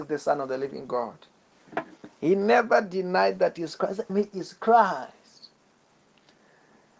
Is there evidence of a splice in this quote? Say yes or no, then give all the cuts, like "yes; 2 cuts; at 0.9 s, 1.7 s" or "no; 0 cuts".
yes; 1 cut; at 4.1 s